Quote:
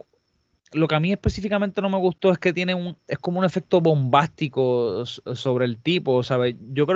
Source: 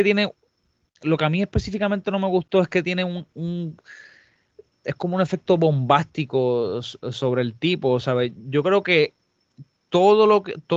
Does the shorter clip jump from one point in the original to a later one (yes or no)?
yes